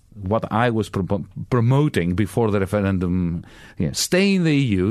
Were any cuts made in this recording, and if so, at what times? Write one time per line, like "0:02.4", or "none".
none